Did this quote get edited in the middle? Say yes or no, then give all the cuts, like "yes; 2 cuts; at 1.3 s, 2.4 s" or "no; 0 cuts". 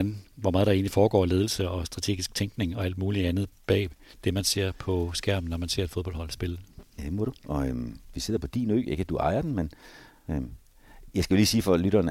yes; 1 cut; at 6.8 s